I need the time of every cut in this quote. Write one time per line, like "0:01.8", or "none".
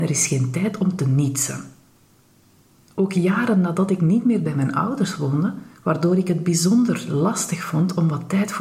0:05.8